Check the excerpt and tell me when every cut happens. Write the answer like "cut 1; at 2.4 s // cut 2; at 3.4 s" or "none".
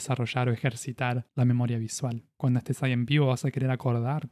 cut 1; at 2.3 s